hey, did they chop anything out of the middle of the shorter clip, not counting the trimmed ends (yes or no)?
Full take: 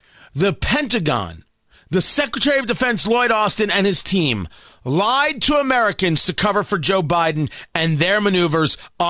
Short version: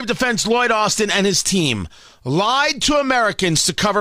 no